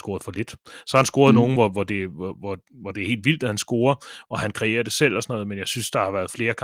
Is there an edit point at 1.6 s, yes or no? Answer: no